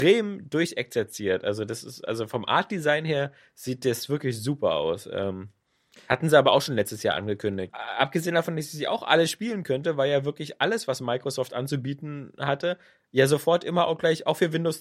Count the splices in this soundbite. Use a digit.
1